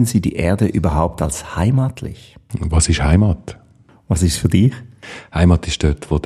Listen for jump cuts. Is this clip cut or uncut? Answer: uncut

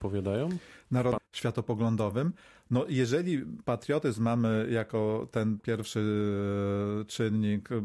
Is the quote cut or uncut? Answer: cut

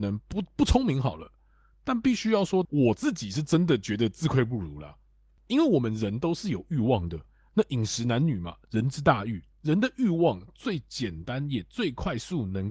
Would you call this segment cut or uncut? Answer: cut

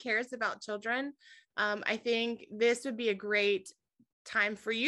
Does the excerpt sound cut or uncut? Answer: uncut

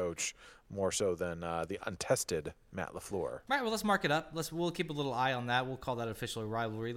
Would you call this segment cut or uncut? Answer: uncut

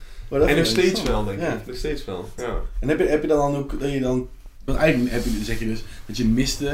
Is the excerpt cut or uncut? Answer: cut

